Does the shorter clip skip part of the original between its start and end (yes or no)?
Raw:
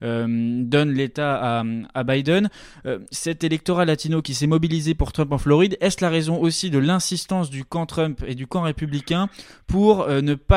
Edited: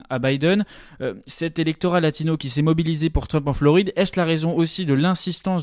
no